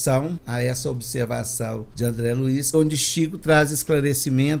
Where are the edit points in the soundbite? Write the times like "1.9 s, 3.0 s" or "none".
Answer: 2.7 s